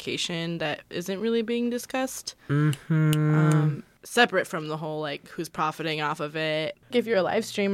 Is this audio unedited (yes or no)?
yes